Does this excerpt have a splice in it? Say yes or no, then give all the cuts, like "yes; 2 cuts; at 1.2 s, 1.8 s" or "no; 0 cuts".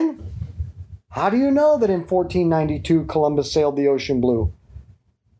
yes; 1 cut; at 1.1 s